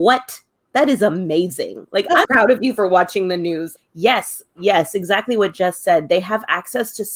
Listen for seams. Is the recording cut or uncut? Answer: cut